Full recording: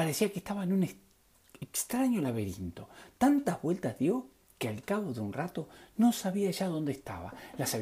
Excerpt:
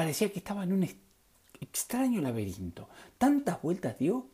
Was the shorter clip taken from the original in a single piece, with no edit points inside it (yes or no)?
yes